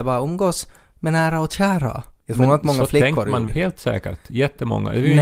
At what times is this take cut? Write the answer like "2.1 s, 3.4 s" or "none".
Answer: 2.2 s, 3.5 s